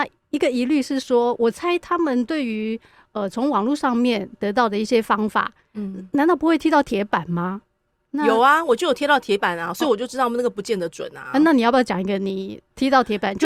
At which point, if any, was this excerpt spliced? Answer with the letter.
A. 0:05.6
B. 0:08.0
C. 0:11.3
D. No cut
B